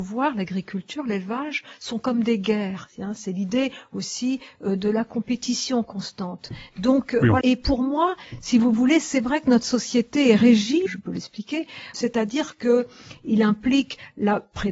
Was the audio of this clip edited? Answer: yes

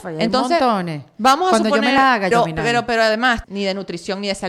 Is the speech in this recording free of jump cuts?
no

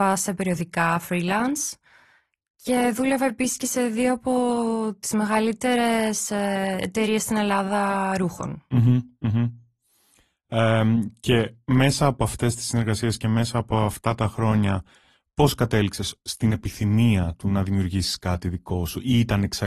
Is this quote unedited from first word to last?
yes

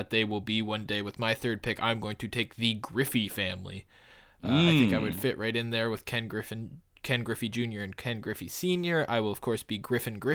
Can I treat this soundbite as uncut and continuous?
yes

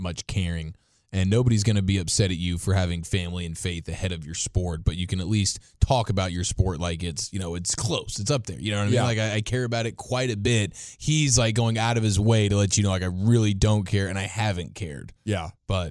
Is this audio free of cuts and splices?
yes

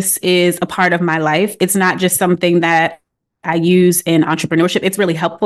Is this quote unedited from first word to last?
yes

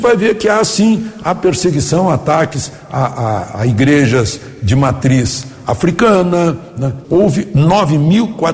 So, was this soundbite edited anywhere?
yes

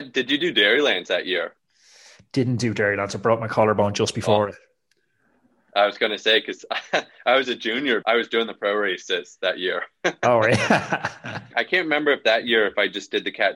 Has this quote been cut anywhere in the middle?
yes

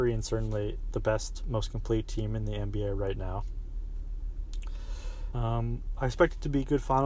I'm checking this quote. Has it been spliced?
yes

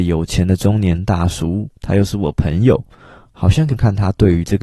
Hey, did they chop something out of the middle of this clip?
yes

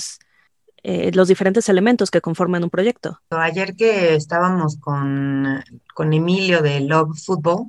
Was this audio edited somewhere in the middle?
yes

